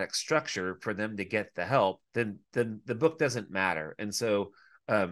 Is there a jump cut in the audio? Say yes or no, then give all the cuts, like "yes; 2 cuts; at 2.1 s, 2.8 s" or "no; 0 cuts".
yes; 1 cut; at 2.1 s